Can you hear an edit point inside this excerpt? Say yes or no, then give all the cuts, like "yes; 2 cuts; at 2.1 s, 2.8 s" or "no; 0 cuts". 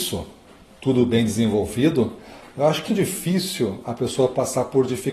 yes; 1 cut; at 2.9 s